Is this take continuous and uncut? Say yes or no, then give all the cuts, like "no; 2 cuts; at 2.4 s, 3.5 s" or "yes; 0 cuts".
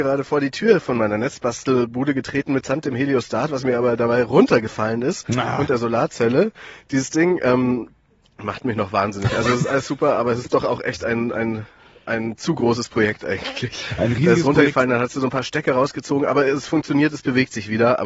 yes; 0 cuts